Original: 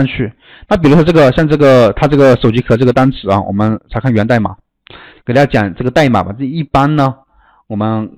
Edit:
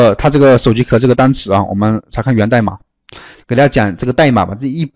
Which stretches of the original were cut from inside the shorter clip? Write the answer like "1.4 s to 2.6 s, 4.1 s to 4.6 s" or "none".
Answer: none